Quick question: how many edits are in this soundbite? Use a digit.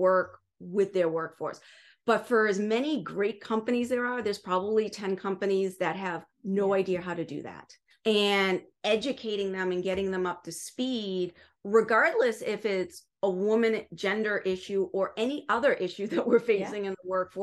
1